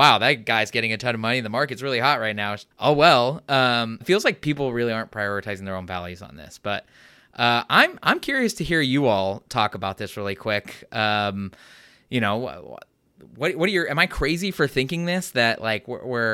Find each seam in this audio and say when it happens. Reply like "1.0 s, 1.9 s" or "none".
2.7 s, 4.0 s